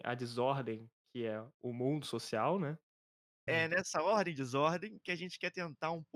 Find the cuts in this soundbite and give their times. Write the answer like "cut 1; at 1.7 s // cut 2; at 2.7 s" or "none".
cut 1; at 1.6 s // cut 2; at 3.5 s